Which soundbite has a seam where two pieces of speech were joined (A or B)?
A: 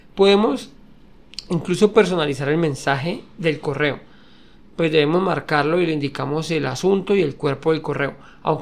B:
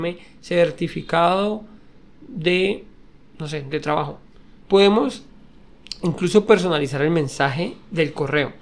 B